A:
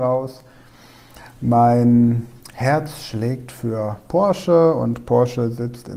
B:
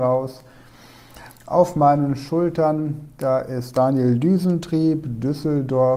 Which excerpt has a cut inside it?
B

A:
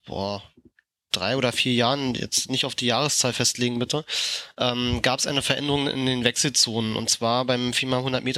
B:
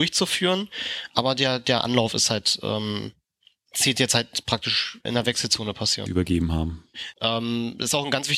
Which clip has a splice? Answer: B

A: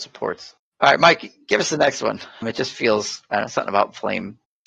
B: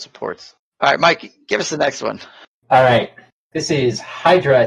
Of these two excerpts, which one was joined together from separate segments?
A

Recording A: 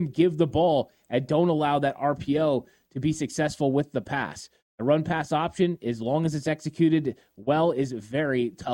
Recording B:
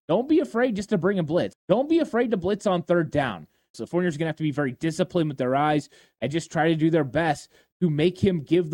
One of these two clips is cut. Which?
B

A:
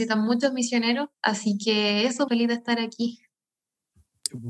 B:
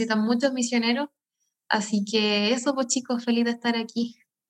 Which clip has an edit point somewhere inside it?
A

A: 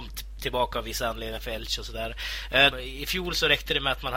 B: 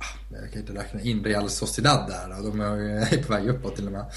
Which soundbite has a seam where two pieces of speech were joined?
A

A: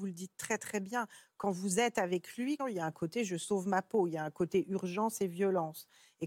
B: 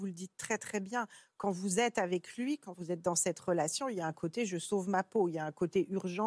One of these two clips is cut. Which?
A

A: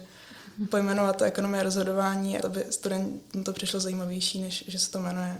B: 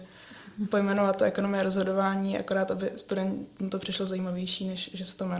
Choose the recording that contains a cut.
A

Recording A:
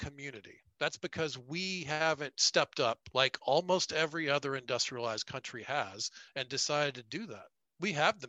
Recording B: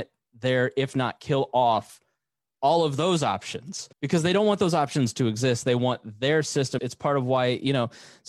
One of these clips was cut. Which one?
B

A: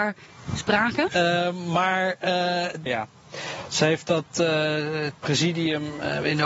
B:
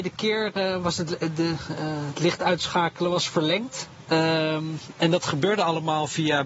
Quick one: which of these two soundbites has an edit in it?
A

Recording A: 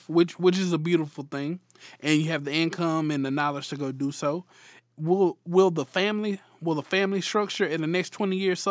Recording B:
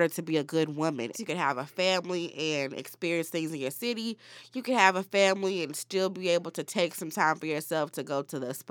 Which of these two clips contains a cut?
B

